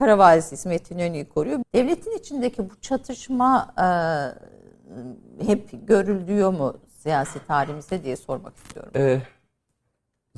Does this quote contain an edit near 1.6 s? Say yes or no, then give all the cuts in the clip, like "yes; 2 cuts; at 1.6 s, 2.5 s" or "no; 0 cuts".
yes; 1 cut; at 1.6 s